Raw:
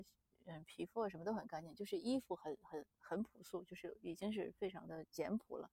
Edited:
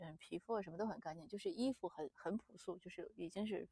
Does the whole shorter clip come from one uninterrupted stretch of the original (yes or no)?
no